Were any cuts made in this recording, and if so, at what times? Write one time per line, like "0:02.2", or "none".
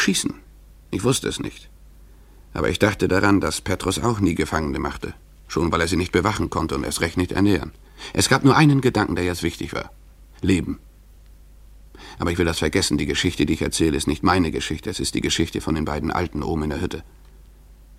none